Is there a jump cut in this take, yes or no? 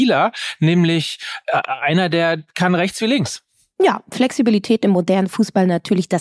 no